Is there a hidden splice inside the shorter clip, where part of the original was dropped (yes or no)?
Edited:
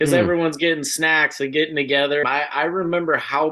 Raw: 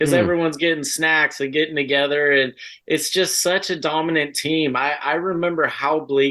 yes